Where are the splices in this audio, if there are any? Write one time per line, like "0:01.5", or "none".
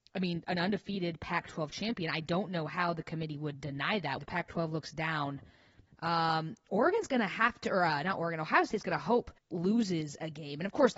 0:04.2
0:05.9
0:09.4